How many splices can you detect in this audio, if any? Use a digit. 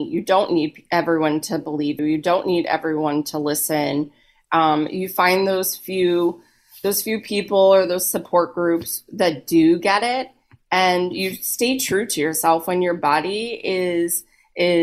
1